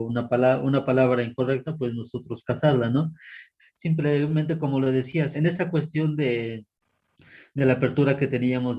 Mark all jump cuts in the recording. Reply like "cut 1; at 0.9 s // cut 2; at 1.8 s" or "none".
cut 1; at 3.6 s // cut 2; at 5.3 s